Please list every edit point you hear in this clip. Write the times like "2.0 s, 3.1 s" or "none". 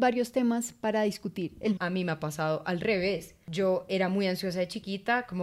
1.8 s